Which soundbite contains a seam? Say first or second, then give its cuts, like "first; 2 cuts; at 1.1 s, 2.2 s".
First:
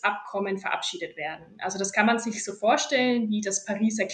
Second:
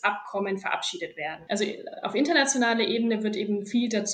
second; 1 cut; at 1.5 s